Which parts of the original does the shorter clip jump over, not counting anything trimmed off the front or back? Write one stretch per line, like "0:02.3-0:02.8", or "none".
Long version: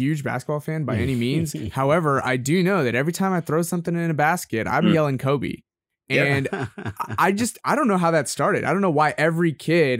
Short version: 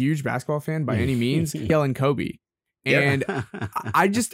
0:01.7-0:04.9